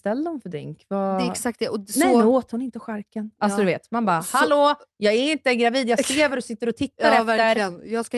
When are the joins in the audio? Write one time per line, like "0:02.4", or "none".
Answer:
none